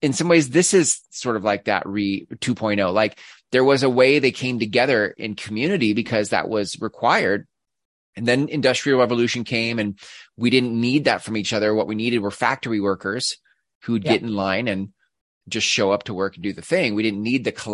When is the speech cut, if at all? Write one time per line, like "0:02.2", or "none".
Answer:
none